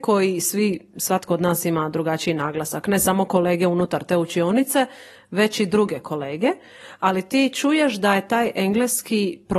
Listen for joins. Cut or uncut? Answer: uncut